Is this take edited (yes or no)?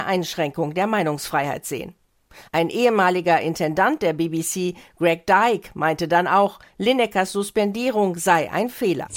no